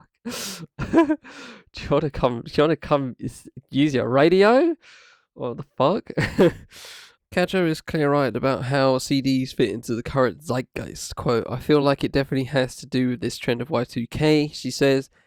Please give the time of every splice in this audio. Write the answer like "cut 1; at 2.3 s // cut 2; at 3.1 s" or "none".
none